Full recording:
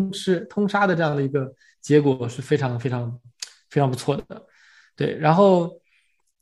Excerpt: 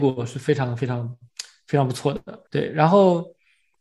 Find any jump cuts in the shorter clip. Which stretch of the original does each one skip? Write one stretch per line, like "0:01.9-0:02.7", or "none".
0:04.5-0:04.9